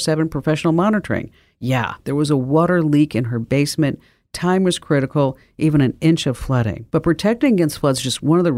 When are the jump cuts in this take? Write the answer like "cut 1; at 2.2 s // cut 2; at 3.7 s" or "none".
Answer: cut 1; at 6.9 s